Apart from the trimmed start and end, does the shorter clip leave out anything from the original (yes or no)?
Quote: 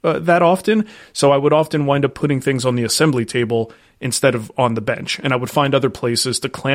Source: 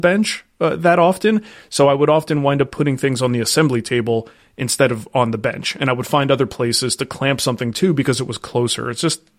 no